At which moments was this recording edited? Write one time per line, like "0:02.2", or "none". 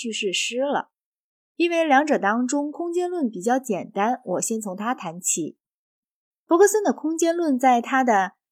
none